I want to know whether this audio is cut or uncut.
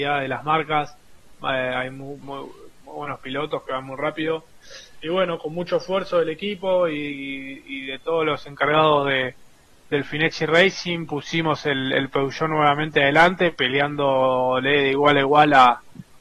cut